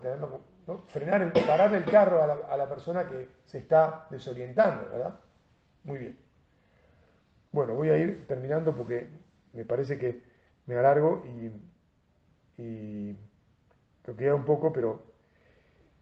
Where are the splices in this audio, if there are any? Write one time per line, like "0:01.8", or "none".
none

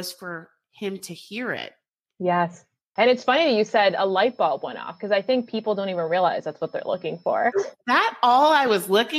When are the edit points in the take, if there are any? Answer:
0:03.0
0:07.5

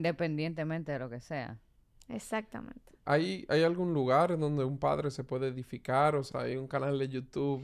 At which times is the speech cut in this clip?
0:06.3

